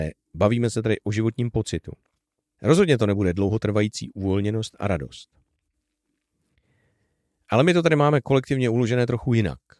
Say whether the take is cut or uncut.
cut